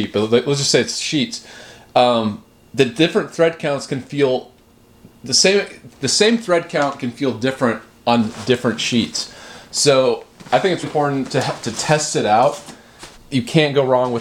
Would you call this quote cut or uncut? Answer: cut